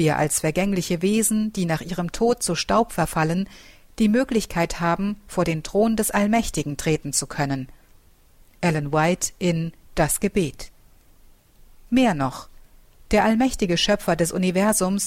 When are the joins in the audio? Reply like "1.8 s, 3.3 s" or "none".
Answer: none